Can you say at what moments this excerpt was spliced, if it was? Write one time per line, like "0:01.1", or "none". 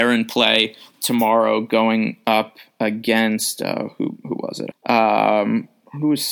0:04.7